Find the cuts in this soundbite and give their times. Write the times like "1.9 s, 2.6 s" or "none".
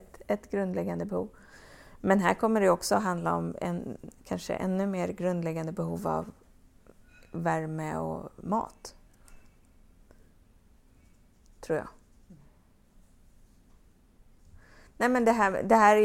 none